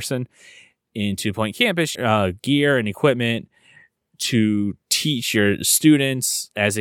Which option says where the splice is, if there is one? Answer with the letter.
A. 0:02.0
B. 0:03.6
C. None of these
A